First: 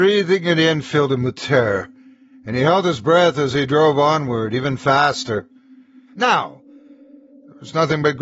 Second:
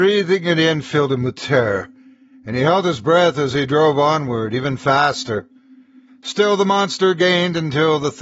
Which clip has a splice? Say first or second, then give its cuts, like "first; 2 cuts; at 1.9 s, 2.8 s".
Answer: first; 1 cut; at 6.1 s